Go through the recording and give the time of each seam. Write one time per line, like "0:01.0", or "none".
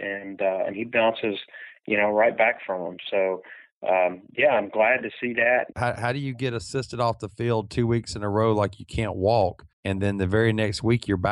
0:05.7
0:09.7